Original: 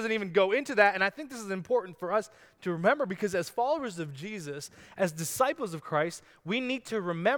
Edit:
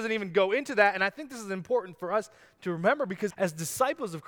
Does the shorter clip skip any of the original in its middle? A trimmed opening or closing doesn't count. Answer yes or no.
yes